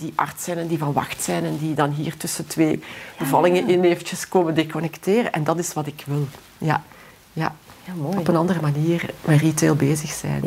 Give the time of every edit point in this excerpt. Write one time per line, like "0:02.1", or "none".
none